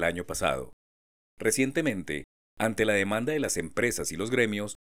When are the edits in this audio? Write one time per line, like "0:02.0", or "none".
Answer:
0:01.3